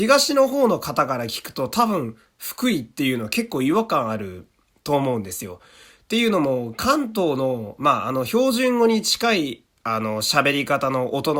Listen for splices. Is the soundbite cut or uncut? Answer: uncut